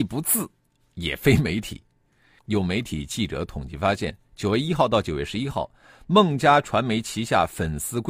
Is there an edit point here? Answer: yes; 1 cut; at 2.4 s

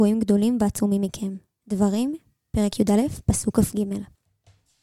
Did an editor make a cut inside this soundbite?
no; 0 cuts

